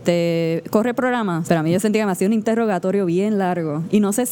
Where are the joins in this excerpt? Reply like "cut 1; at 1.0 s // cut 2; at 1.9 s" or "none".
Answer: cut 1; at 1.4 s

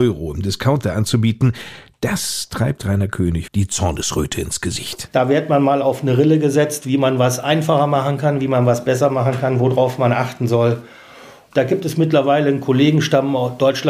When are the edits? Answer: cut 1; at 3.5 s // cut 2; at 5.1 s

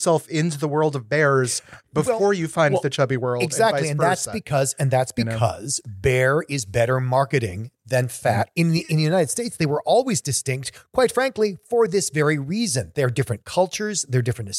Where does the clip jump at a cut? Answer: cut 1; at 8.5 s

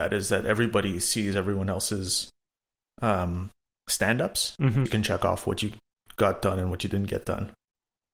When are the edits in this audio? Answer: cut 1; at 4.9 s

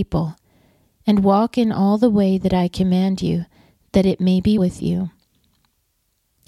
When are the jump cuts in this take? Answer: cut 1; at 4.6 s

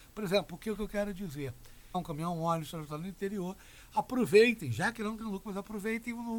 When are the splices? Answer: cut 1; at 1.9 s

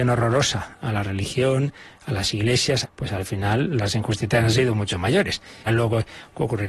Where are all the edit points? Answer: cut 1; at 2.8 s // cut 2; at 5.7 s

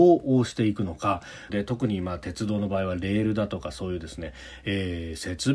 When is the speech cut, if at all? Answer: cut 1; at 1.5 s

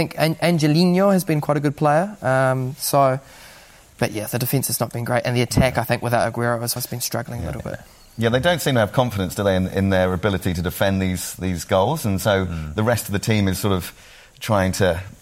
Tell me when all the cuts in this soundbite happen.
cut 1; at 6.8 s

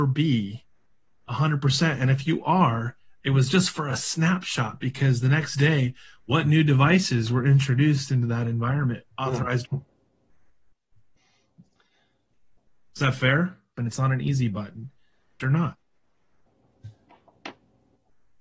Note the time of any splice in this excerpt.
cut 1; at 9.7 s // cut 2; at 13.8 s // cut 3; at 15.4 s

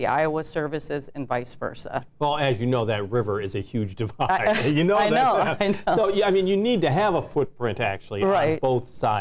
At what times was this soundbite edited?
none

